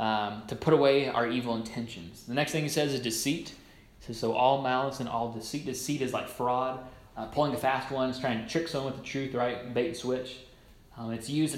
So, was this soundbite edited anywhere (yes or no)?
no